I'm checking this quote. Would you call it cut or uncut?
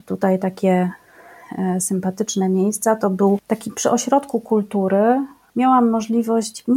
uncut